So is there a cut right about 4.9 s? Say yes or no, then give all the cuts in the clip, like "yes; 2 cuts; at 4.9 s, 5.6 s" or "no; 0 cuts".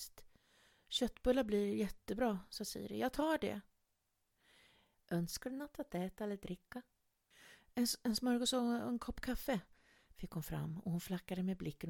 yes; 1 cut; at 4.9 s